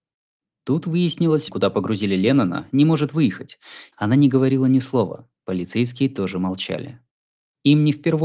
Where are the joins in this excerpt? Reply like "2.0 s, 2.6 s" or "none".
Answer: 1.5 s, 3.9 s